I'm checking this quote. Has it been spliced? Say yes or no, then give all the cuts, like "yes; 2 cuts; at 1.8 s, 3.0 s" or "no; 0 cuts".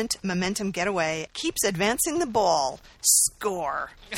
yes; 1 cut; at 1.3 s